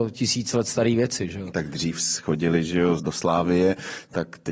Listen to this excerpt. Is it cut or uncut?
cut